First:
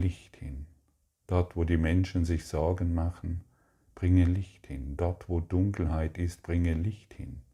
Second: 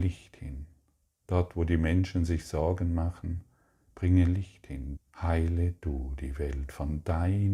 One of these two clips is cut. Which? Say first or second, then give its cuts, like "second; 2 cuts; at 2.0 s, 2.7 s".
second; 1 cut; at 5.0 s